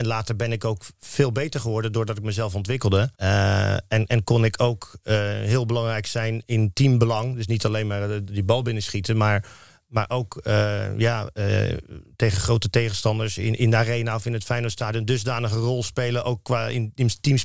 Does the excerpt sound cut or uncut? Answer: cut